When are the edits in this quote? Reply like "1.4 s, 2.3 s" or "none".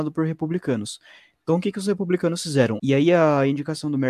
2.8 s